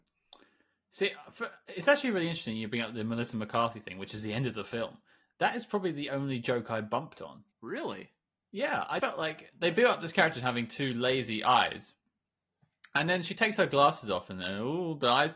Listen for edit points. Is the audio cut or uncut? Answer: cut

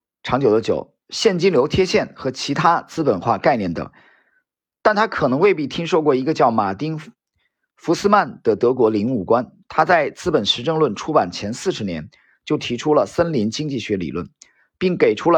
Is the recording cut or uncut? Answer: uncut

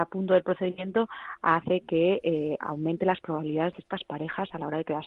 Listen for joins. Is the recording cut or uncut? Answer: uncut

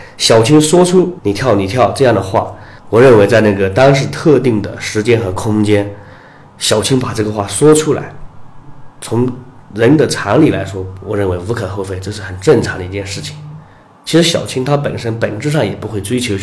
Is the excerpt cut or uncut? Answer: uncut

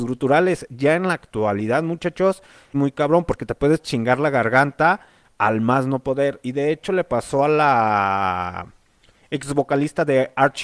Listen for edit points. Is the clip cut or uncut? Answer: cut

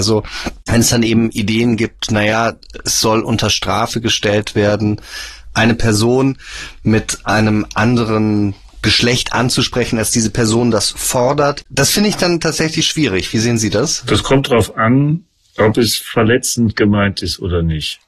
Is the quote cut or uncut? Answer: cut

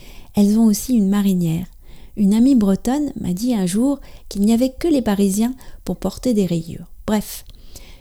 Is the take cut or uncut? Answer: uncut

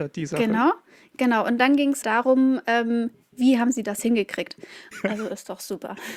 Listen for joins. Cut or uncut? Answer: cut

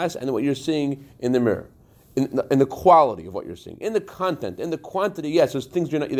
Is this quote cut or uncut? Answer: uncut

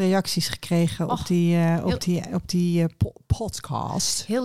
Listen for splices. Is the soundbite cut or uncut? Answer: uncut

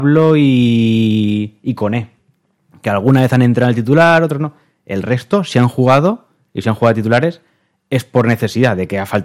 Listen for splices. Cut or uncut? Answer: uncut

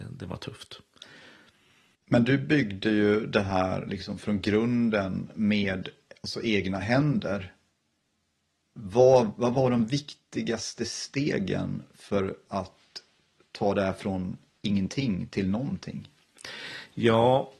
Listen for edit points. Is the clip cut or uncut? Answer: uncut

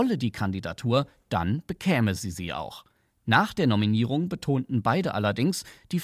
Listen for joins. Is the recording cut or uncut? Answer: uncut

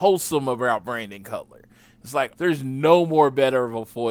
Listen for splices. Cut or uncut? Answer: cut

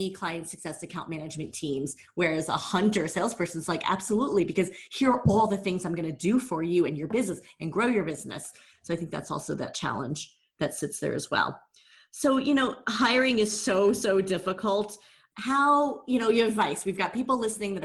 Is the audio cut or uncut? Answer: uncut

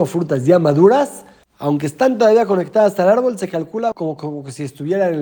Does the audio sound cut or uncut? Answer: cut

